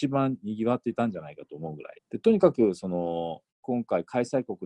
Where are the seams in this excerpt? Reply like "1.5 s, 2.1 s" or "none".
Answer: 2.0 s, 3.5 s